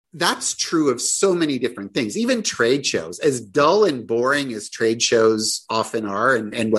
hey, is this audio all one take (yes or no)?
yes